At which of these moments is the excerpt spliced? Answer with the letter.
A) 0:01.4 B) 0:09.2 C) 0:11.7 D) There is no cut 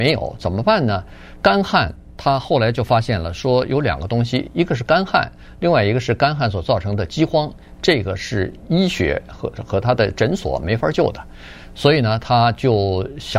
A